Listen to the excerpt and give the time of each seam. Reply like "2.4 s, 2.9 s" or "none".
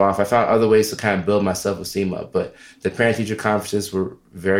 none